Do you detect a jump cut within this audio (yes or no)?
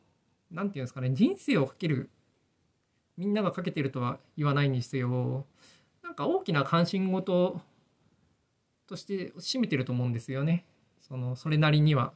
no